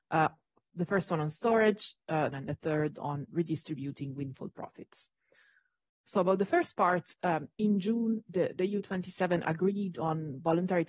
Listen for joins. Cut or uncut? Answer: cut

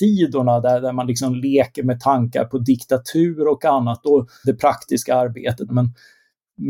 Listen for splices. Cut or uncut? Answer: cut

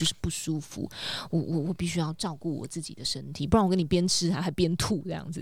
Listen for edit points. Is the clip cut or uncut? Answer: uncut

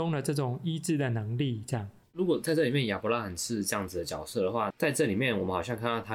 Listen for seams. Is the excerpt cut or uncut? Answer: cut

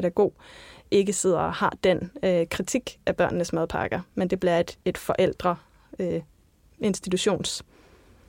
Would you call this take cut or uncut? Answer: uncut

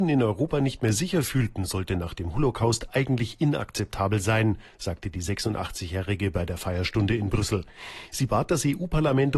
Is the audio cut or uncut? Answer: uncut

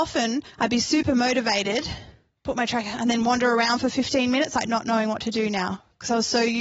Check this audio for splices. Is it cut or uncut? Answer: uncut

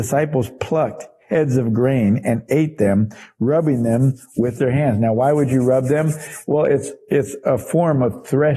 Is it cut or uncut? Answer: uncut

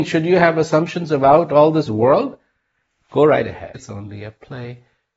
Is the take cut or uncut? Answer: cut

